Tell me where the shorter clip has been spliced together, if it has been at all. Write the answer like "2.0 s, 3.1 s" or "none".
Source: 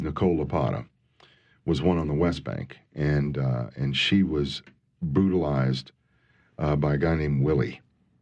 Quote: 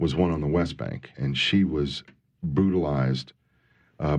1.1 s